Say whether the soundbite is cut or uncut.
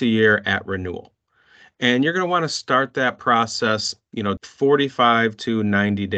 cut